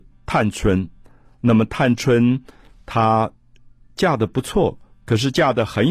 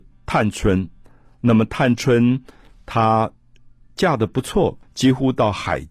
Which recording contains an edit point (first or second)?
second